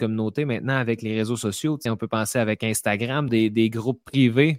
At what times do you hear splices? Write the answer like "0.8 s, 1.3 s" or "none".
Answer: 1.9 s, 3.3 s